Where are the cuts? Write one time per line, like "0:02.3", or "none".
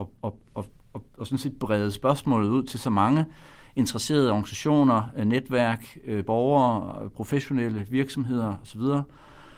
none